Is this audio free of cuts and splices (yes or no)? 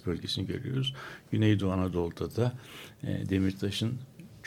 yes